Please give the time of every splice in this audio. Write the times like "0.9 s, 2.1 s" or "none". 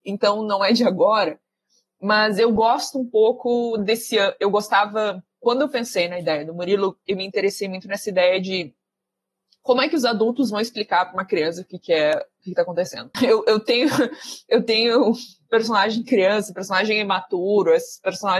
13.1 s